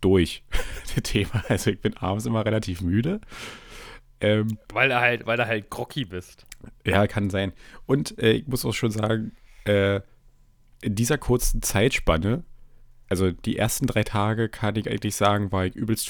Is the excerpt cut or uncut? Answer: uncut